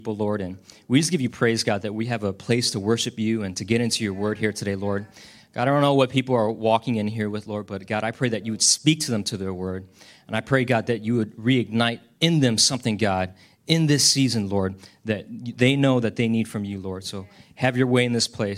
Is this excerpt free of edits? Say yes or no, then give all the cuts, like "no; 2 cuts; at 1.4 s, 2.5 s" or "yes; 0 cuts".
yes; 0 cuts